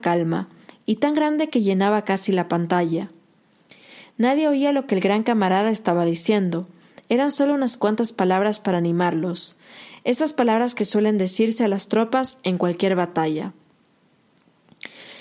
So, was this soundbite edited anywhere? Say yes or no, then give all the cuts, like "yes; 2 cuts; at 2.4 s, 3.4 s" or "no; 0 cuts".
no; 0 cuts